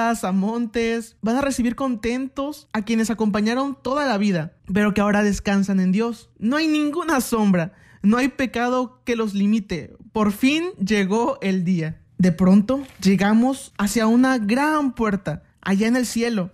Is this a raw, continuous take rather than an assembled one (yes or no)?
yes